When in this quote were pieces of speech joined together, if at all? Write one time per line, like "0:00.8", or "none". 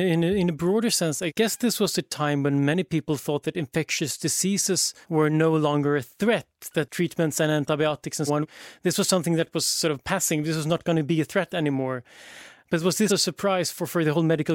0:05.0
0:08.3
0:13.1